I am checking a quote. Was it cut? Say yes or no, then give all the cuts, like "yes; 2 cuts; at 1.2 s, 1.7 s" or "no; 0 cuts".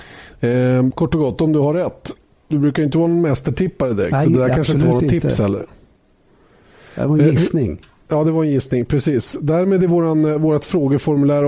yes; 1 cut; at 0.9 s